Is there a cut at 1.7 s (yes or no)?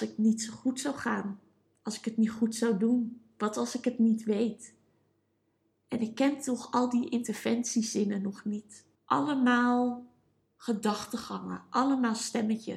no